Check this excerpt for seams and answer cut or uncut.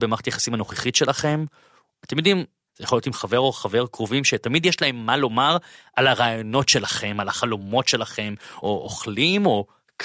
cut